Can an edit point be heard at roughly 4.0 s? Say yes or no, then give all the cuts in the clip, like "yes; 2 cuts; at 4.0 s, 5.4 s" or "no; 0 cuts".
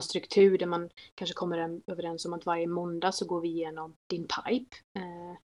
yes; 1 cut; at 4.0 s